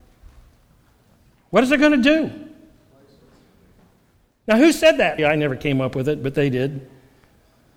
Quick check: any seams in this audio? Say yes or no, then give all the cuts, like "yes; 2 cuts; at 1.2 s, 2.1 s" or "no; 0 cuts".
yes; 1 cut; at 5.2 s